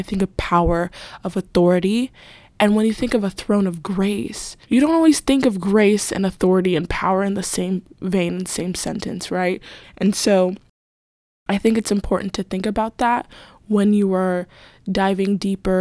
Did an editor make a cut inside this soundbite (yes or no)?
yes